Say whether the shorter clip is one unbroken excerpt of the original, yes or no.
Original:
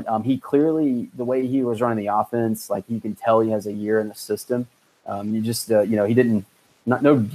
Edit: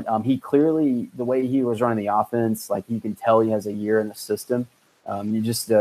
yes